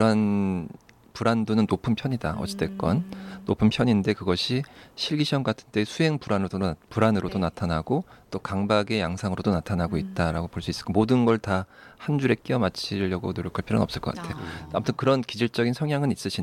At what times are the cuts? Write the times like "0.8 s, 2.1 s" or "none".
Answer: none